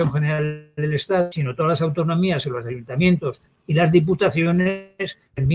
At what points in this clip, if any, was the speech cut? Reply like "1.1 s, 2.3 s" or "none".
none

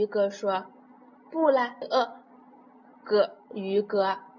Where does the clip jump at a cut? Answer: 1.8 s

